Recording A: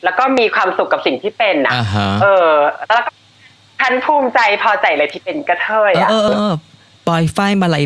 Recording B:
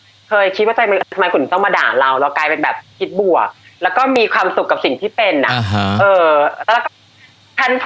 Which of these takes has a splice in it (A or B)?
A